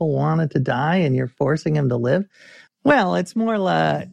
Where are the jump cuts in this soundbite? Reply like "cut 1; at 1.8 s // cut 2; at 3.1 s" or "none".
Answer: cut 1; at 2.7 s